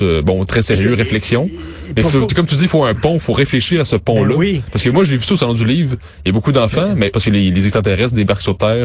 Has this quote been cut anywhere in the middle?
yes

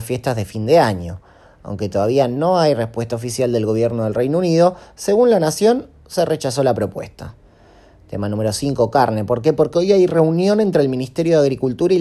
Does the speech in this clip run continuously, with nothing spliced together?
yes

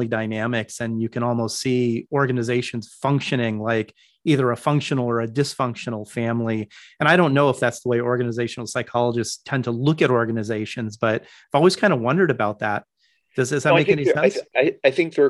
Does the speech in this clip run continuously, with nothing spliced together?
yes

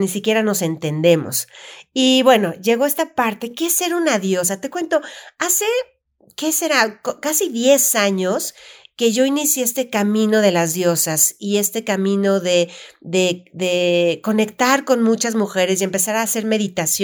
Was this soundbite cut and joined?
no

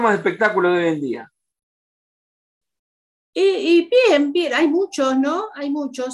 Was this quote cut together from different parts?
no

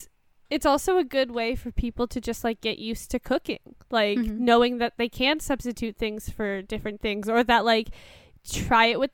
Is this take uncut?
yes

